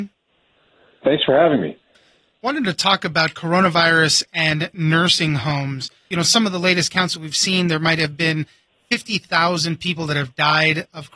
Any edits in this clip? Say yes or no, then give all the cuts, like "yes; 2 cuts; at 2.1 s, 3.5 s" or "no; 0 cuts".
no; 0 cuts